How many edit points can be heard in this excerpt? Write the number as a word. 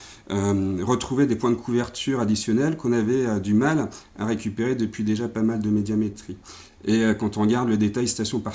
zero